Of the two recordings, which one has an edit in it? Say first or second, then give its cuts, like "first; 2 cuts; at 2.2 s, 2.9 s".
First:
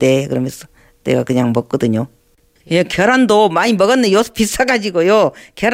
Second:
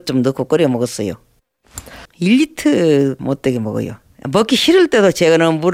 second; 1 cut; at 2.1 s